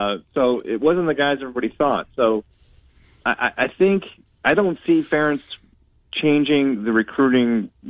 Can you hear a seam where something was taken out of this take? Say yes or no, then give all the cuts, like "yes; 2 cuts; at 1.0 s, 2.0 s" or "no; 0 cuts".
no; 0 cuts